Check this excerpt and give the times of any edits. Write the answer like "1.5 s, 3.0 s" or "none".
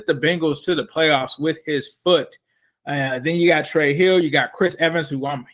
none

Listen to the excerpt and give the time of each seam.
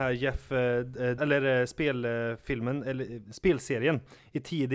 1.2 s

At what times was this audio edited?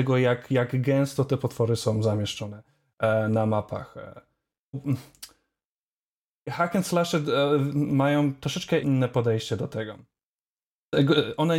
4.7 s, 8.8 s

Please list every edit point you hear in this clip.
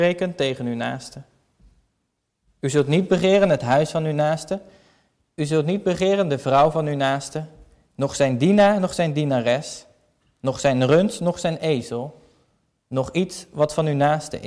none

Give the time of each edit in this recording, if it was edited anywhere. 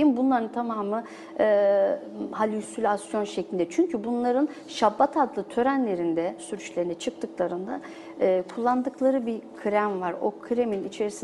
6.4 s

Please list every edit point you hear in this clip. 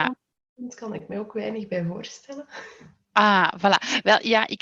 none

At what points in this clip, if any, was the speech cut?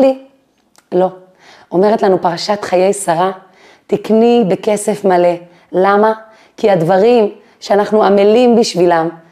none

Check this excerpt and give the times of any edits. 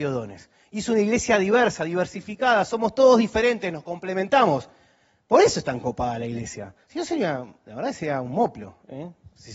none

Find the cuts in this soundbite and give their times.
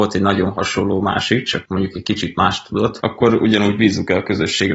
3.0 s

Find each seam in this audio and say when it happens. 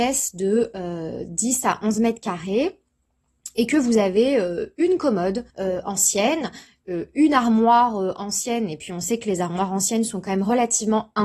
5.5 s

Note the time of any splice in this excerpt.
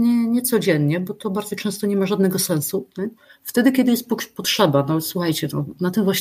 2.9 s

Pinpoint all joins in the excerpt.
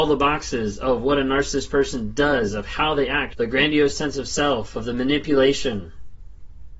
3.3 s

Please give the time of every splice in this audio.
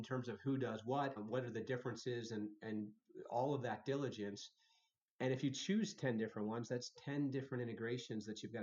1.2 s

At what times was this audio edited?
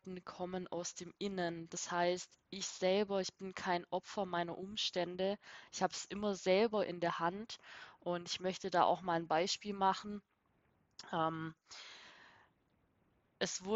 none

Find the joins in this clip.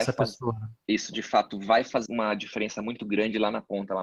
2.1 s

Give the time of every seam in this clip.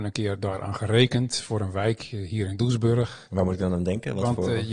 3.3 s

